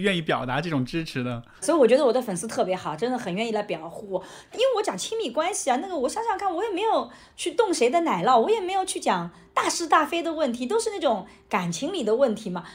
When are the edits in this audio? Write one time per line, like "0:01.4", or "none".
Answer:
0:01.6